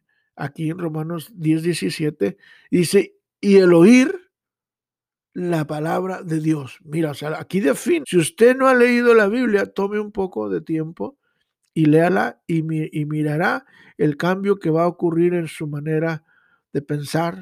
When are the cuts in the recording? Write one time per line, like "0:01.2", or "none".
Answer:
0:08.0